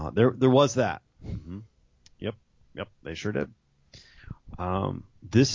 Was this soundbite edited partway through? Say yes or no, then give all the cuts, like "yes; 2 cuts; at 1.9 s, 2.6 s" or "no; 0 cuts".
no; 0 cuts